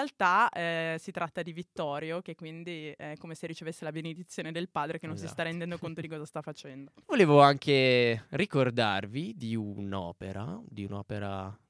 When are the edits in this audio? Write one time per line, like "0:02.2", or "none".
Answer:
0:07.0